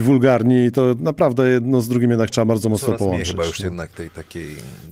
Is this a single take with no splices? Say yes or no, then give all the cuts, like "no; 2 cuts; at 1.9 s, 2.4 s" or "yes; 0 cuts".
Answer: no; 1 cut; at 3.9 s